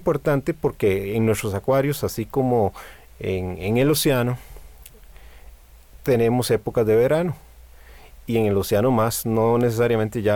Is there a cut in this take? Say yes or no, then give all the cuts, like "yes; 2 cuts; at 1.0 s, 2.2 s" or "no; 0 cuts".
no; 0 cuts